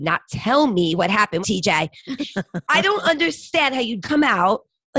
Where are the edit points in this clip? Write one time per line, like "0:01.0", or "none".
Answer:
0:01.4
0:04.0